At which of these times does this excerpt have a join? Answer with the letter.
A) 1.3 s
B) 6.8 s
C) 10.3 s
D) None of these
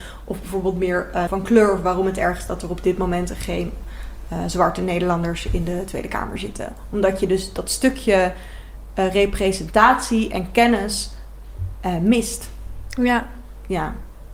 A